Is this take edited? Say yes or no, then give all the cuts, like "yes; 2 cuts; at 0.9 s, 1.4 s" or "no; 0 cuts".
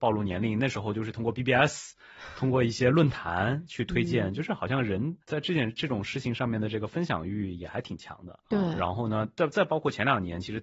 yes; 2 cuts; at 5.2 s, 8.4 s